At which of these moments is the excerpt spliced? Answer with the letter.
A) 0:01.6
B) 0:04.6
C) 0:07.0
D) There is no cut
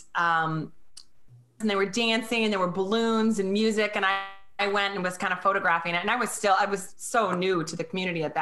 A